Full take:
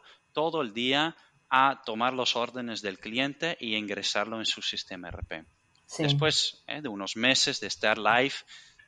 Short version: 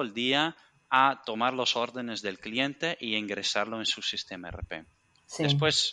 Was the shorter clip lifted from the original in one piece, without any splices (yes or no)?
yes